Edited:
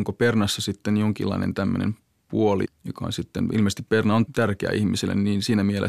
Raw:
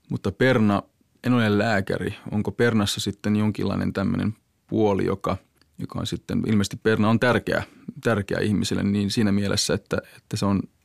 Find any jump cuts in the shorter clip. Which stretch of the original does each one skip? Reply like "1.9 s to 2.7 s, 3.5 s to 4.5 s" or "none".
5.0 s to 5.6 s, 7.2 s to 7.9 s